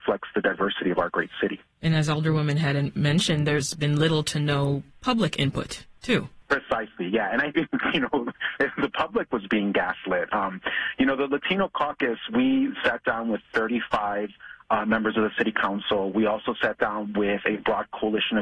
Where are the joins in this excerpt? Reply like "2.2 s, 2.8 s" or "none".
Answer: none